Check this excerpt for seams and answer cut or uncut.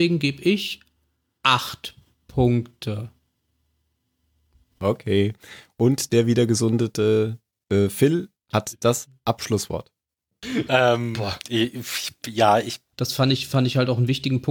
cut